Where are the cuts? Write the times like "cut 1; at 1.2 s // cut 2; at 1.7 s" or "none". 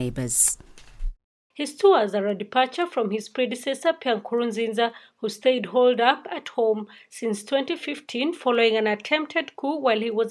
cut 1; at 1.5 s